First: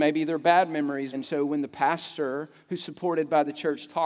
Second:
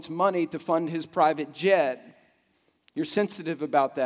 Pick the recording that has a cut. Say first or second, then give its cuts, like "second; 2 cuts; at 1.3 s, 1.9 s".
first; 1 cut; at 1.1 s